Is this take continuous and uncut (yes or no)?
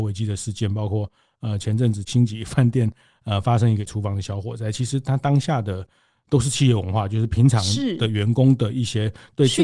yes